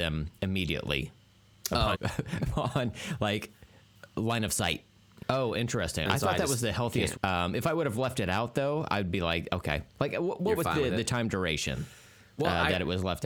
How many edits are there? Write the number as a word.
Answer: three